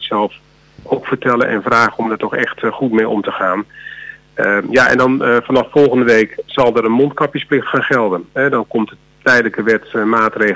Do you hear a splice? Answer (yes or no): no